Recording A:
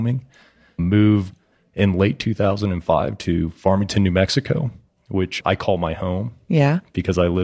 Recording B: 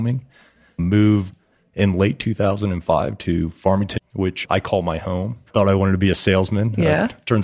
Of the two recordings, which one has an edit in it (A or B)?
B